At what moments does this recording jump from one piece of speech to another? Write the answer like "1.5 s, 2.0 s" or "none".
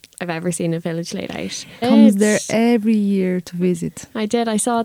1.8 s